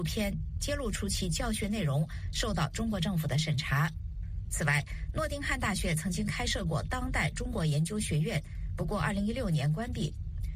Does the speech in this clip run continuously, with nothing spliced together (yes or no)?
yes